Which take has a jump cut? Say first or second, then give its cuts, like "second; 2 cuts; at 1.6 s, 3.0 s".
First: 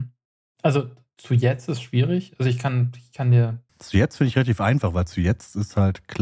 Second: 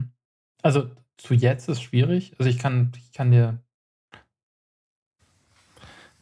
first; 1 cut; at 3.7 s